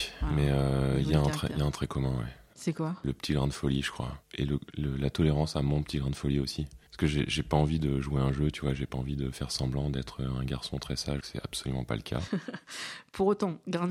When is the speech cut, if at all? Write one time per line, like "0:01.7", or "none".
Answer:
0:06.9
0:11.2